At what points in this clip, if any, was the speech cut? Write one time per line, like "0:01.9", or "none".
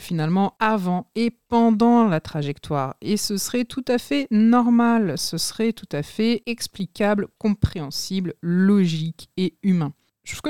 0:05.2